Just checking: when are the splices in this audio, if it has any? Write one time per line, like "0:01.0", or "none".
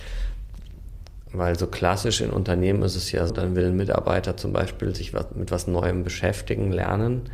0:03.3